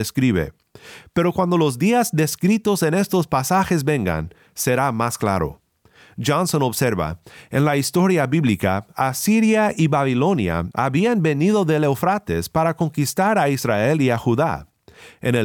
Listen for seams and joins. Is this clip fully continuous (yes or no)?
yes